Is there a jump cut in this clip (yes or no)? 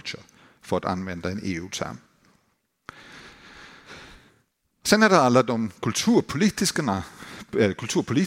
no